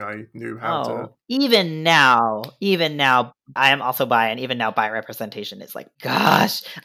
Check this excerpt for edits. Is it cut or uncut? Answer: cut